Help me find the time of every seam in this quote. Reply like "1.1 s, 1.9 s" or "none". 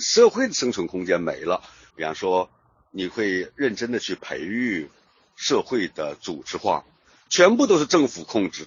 1.9 s, 7.3 s